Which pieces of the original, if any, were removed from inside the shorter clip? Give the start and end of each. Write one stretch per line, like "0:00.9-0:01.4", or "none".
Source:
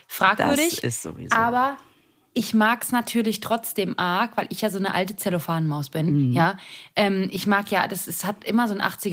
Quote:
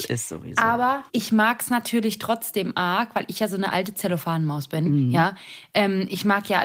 0:01.8-0:02.3